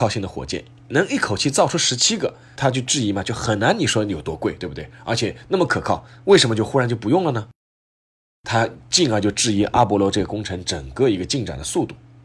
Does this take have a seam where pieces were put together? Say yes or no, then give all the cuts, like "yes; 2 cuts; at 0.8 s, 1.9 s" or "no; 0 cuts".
no; 0 cuts